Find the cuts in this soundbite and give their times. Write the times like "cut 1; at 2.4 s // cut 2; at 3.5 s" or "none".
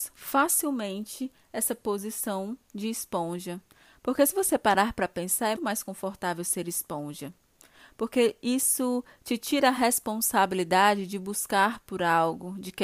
cut 1; at 5.5 s